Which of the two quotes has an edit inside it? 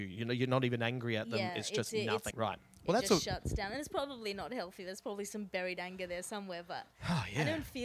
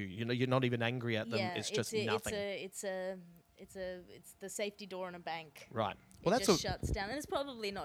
first; 1 cut; at 2.3 s

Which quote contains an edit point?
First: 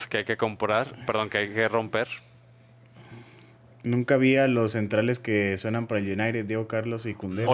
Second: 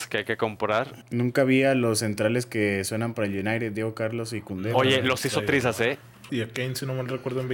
second; 2 cuts; at 1.0 s, 6.3 s

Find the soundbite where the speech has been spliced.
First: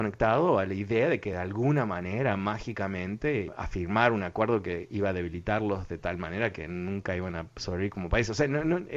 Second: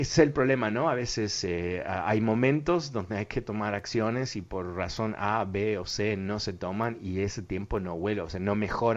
first; 1 cut; at 3.5 s

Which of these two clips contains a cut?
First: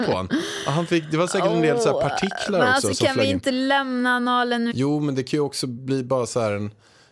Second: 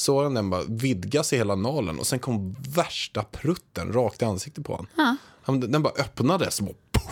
first; 1 cut; at 4.7 s

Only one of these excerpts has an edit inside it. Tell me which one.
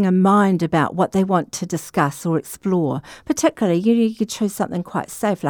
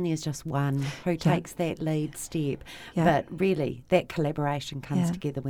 first; 1 cut; at 4.3 s

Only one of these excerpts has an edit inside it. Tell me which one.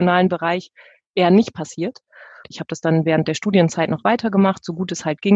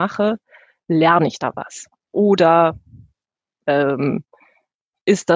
first; 1 cut; at 2.4 s

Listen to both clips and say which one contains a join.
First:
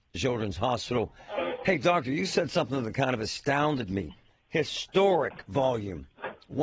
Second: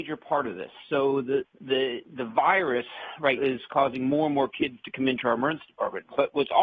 second; 2 cuts; at 1.4 s, 3.4 s

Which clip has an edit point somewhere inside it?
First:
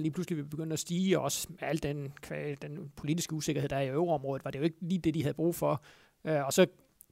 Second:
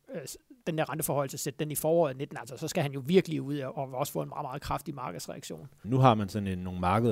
second; 1 cut; at 5.8 s

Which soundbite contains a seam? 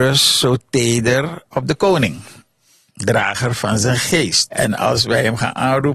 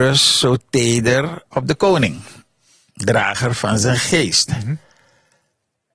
first; 1 cut; at 4.5 s

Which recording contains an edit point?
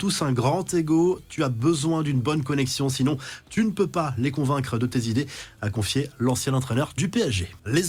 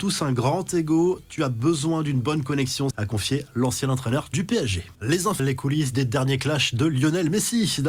second; 2 cuts; at 2.9 s, 5.4 s

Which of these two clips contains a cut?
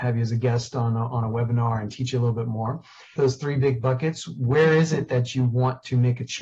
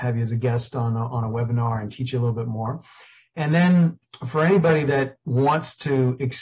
first; 1 cut; at 3.2 s

